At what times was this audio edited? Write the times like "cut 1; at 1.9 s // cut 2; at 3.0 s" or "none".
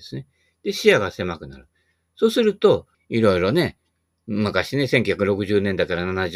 cut 1; at 2.9 s